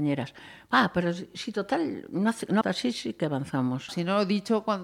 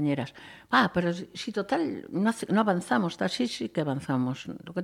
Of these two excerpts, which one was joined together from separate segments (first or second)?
first